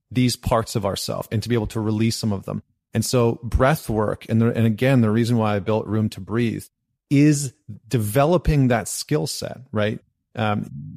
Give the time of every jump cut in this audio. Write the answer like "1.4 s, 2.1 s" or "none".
1.3 s